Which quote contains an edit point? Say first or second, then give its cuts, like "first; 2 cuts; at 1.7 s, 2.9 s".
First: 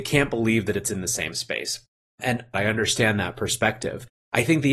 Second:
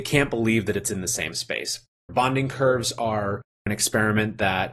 second; 1 cut; at 2.1 s